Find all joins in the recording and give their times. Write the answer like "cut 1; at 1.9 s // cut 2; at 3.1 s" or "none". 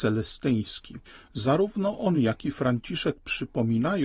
none